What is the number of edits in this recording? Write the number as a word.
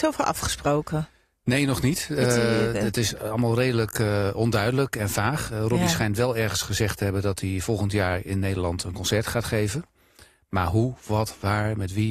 zero